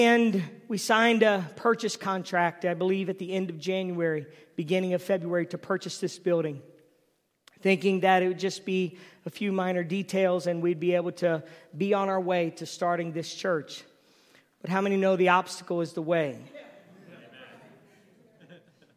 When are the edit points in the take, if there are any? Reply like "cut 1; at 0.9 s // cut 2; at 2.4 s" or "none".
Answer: none